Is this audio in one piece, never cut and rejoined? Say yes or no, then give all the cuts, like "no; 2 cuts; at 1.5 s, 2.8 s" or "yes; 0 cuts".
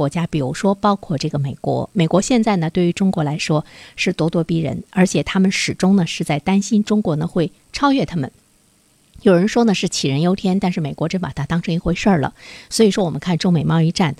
yes; 0 cuts